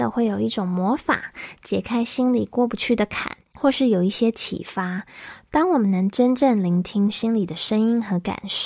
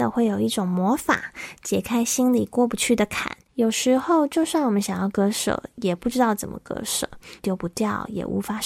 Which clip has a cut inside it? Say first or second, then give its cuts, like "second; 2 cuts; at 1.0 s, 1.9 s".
second; 2 cuts; at 3.5 s, 7.4 s